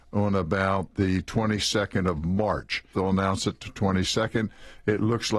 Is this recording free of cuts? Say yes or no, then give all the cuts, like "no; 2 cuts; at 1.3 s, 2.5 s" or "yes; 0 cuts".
no; 1 cut; at 2.9 s